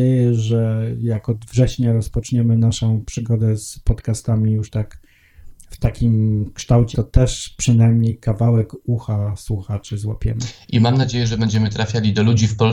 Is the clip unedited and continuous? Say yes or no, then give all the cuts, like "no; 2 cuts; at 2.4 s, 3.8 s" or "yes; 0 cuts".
no; 1 cut; at 6.9 s